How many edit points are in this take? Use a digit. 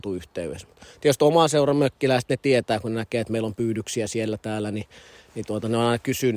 0